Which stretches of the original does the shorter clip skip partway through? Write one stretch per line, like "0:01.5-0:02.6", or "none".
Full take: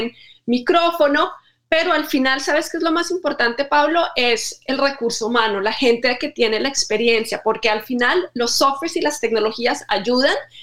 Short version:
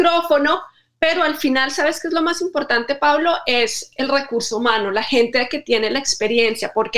none

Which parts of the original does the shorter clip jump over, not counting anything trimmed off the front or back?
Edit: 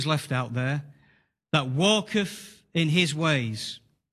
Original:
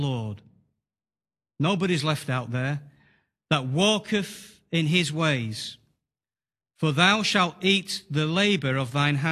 none

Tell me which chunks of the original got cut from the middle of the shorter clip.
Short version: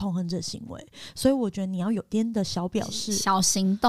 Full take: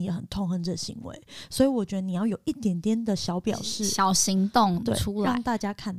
0:02.4-0:02.8

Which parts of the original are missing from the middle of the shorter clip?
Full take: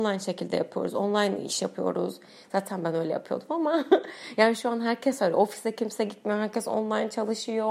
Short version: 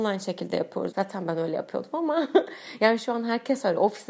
0:00.9-0:02.5

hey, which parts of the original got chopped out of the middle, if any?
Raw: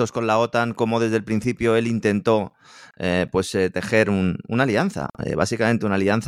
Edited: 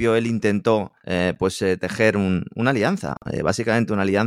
0:02.6-0:02.9

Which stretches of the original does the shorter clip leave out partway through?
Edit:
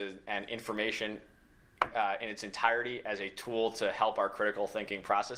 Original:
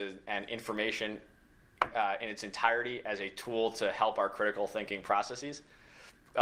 none

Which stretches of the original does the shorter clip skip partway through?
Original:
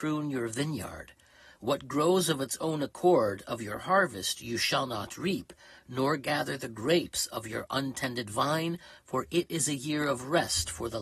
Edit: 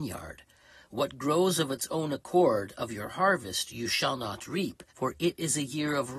0:05.6-0:09.0

